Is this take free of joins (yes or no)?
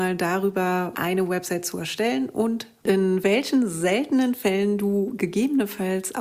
no